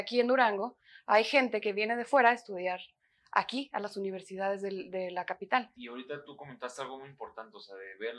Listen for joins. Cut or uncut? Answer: cut